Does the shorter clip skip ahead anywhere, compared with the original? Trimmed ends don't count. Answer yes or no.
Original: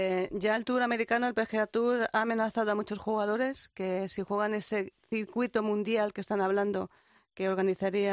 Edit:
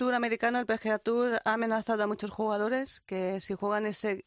no